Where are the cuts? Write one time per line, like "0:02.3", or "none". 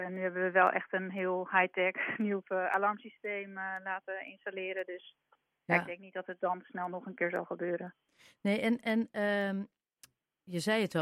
0:02.4

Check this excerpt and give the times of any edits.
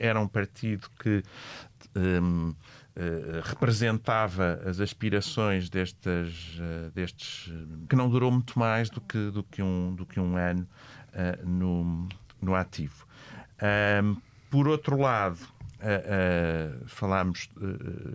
0:07.9

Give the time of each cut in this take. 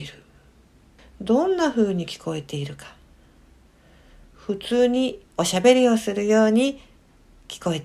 0:01.0
0:05.3

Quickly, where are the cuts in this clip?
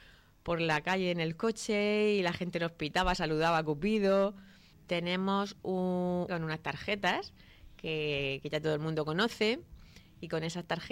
0:04.7
0:06.3

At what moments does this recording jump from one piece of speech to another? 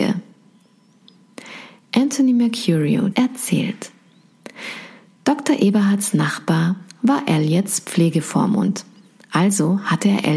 0:03.1

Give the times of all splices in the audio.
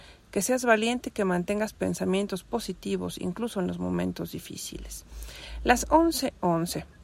none

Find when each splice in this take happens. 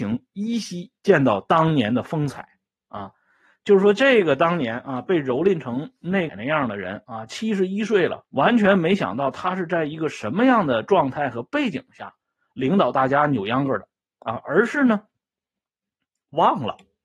0:06.3
0:08.2

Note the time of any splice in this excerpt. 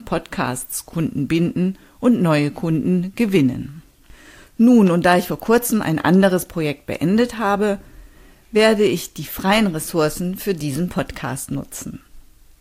none

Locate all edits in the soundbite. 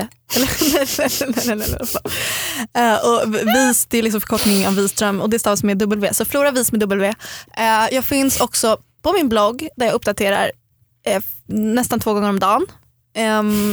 none

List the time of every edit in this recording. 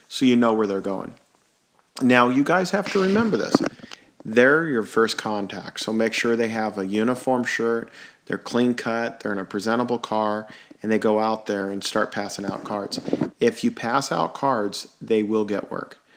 0:04.8

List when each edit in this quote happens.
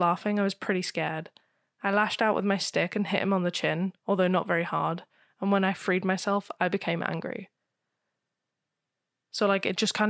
none

